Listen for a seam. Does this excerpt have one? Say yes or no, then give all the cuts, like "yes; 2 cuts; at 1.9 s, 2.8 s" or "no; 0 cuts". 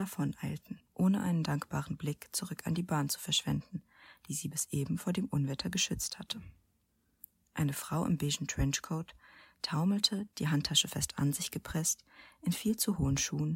no; 0 cuts